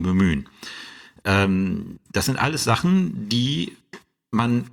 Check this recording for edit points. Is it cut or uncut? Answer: uncut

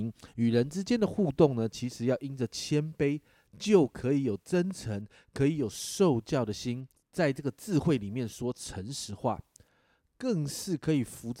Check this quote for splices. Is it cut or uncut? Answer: cut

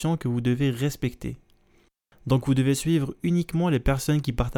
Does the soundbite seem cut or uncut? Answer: cut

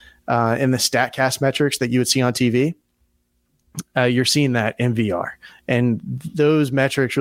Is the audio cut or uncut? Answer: uncut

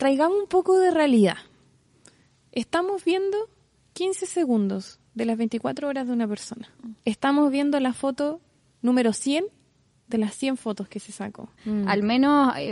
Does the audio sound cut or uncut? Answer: cut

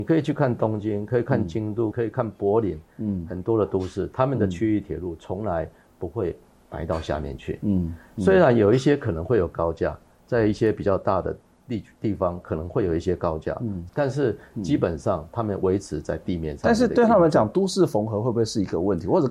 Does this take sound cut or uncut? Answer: cut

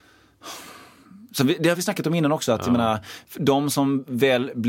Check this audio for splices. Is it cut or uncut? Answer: uncut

